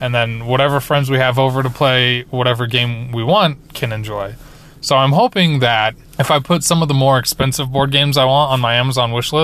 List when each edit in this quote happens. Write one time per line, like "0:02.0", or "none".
0:06.0